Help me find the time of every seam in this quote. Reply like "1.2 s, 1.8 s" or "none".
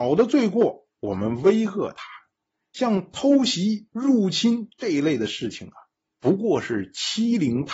none